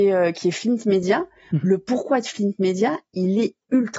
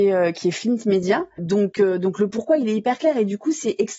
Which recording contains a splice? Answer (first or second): second